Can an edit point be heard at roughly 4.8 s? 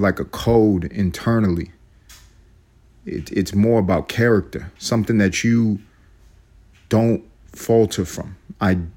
yes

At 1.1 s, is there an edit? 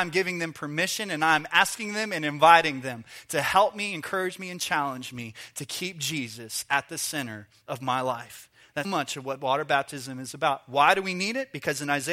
no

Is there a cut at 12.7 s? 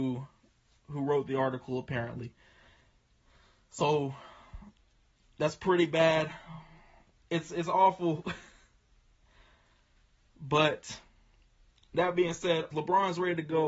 yes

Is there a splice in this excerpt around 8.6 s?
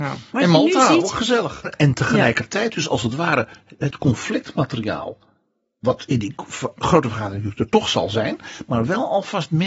no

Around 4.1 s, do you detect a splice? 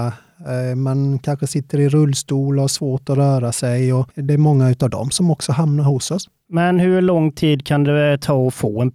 yes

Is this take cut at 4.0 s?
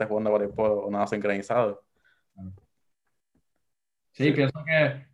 yes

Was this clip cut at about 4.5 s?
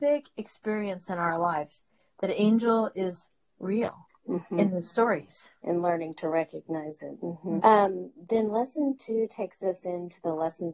no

